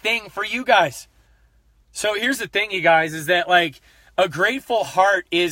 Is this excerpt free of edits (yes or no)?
no